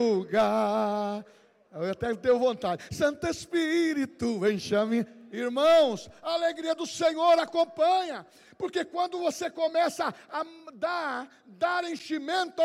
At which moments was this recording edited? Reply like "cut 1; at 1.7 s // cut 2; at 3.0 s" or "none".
none

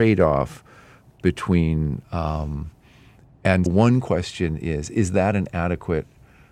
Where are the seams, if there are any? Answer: cut 1; at 2.0 s // cut 2; at 3.7 s

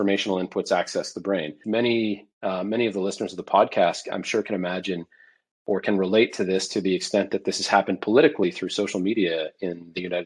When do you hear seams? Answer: cut 1; at 1.6 s

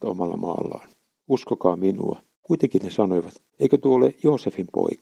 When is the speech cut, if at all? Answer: cut 1; at 2.3 s // cut 2; at 3.5 s

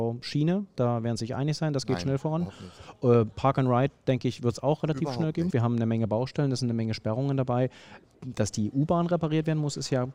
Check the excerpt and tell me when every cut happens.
cut 1; at 5.5 s

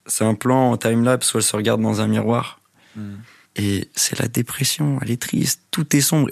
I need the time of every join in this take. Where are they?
cut 1; at 3.5 s

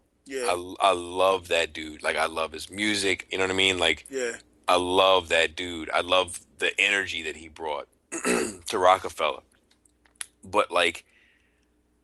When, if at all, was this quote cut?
cut 1; at 3.3 s

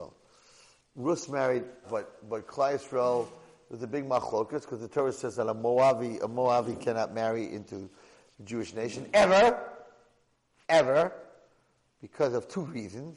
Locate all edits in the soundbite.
cut 1; at 1.8 s

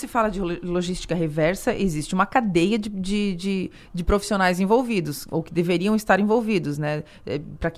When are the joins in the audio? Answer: none

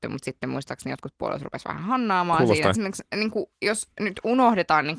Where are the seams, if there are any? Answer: cut 1; at 2.7 s

